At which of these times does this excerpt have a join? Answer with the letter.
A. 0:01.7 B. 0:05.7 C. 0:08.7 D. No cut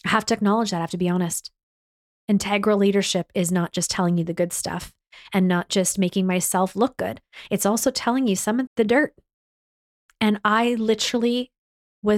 C